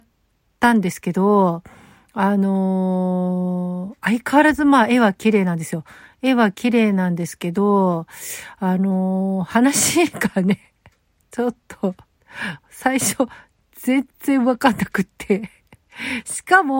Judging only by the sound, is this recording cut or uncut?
uncut